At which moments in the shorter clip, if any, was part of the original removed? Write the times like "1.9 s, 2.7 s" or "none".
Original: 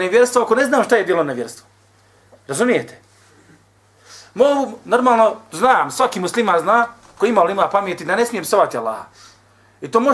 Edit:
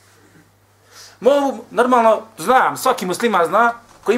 none